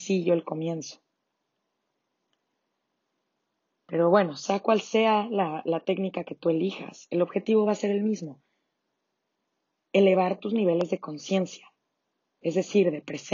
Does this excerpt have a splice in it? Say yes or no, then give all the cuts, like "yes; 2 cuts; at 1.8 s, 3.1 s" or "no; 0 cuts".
no; 0 cuts